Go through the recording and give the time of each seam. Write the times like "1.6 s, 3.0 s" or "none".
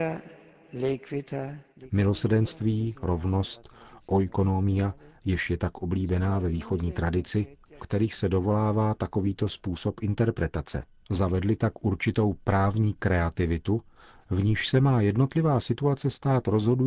7.8 s, 11.0 s